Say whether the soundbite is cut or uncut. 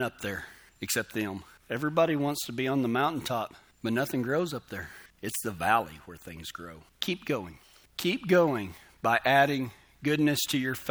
cut